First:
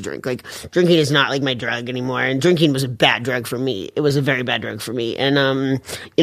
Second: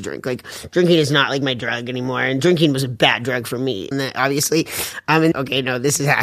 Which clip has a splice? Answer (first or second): second